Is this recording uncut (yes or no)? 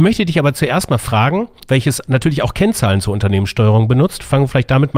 no